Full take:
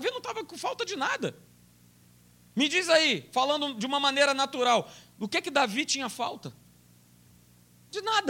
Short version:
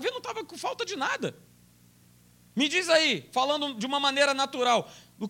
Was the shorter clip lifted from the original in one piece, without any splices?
yes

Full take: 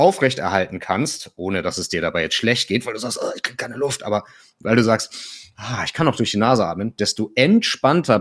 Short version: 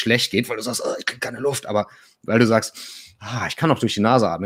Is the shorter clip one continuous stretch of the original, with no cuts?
yes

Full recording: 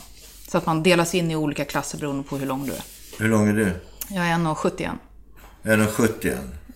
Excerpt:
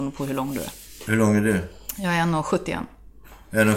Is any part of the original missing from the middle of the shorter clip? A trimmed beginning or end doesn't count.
no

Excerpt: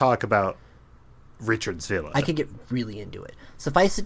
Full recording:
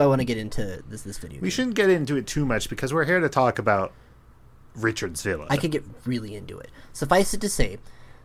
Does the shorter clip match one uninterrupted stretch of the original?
yes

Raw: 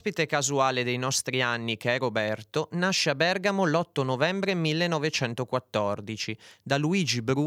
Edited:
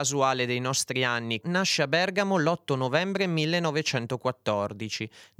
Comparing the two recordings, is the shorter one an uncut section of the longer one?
no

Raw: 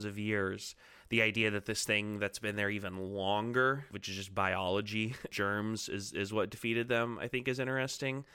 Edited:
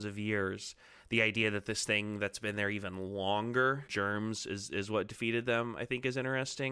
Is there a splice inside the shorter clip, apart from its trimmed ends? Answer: yes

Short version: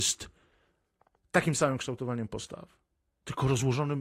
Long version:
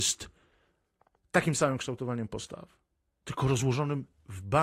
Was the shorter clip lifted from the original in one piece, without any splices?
yes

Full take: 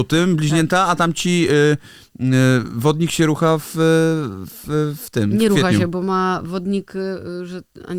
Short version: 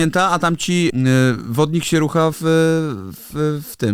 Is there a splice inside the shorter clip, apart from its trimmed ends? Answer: yes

